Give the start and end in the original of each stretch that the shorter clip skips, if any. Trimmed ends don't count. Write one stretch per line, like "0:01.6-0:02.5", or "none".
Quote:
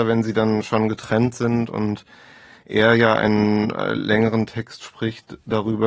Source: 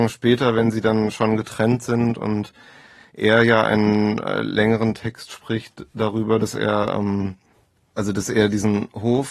none